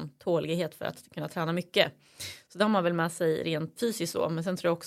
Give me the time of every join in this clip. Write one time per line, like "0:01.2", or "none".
0:03.8